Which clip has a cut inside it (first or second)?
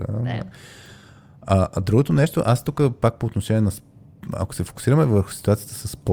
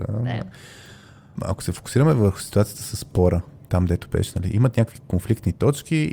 second